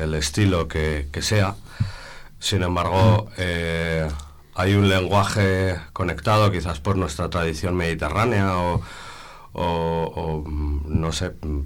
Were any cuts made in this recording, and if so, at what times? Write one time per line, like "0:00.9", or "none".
0:02.4